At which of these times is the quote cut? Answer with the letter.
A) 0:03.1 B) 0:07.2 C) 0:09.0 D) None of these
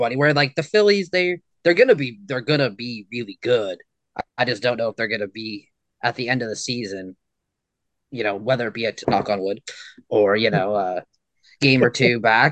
C